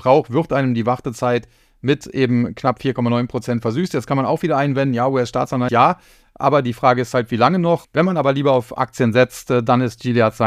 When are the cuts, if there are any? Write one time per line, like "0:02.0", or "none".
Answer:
0:05.7
0:07.8